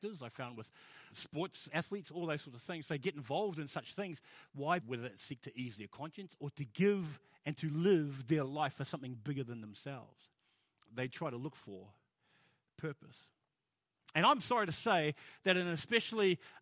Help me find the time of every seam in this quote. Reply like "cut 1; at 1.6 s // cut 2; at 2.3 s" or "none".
cut 1; at 1.1 s // cut 2; at 4.8 s